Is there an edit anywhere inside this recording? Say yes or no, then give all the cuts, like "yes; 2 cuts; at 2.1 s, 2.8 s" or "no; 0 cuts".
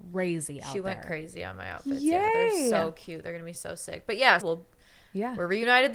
yes; 1 cut; at 4.4 s